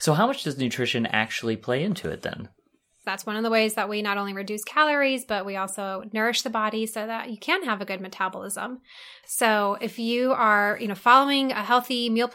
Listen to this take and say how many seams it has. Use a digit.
2